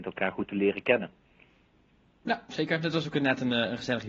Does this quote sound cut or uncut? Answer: uncut